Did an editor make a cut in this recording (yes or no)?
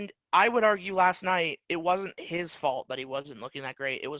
no